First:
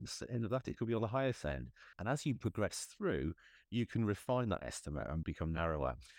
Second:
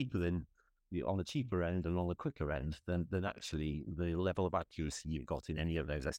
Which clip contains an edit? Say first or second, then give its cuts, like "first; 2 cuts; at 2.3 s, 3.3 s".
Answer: first; 2 cuts; at 1.9 s, 5.2 s